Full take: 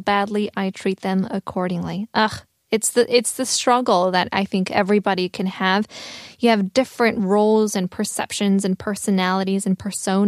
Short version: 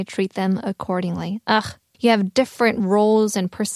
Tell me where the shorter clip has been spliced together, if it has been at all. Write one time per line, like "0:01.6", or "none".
0:01.9